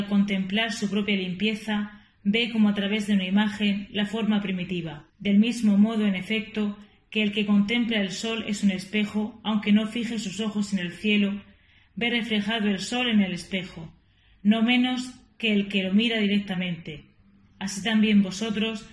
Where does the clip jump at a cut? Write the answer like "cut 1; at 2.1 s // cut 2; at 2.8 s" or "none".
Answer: cut 1; at 5.1 s

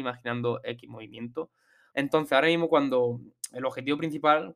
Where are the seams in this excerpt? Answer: cut 1; at 1.9 s

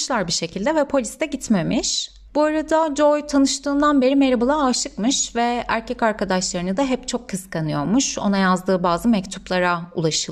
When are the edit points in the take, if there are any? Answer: cut 1; at 2.3 s

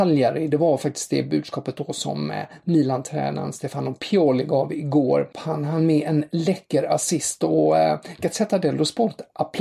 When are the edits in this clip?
cut 1; at 5.3 s

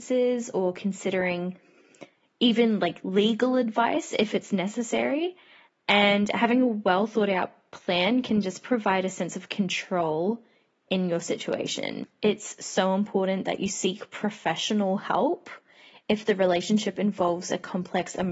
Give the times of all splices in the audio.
none

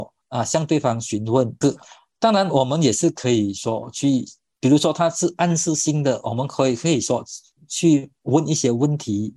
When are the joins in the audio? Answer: cut 1; at 1.6 s

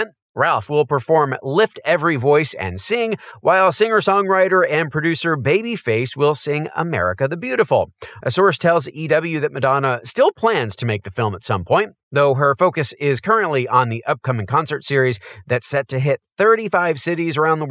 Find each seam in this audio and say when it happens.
cut 1; at 8.2 s

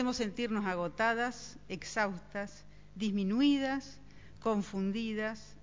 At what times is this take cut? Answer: none

